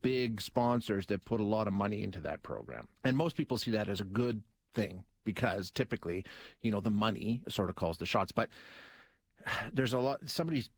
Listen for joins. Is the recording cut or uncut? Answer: cut